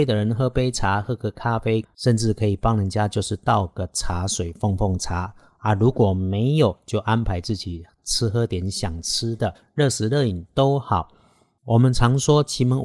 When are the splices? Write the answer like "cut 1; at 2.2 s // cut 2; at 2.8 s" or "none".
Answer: none